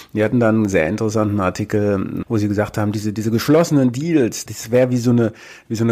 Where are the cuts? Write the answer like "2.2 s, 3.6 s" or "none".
2.2 s, 4.5 s